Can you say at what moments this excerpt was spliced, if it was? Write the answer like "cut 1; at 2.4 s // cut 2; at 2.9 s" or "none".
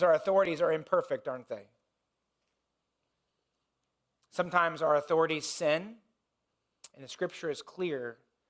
cut 1; at 6.9 s